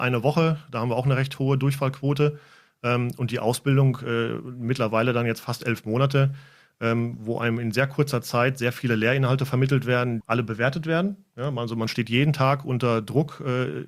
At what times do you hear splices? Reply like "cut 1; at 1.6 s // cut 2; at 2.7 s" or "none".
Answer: cut 1; at 10.2 s